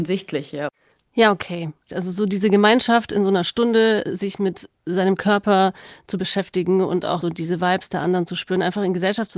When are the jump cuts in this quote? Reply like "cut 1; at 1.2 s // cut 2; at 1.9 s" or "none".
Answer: cut 1; at 1.9 s // cut 2; at 7.2 s